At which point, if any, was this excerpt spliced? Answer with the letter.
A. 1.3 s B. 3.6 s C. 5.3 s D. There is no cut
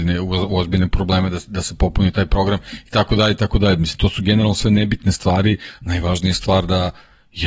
D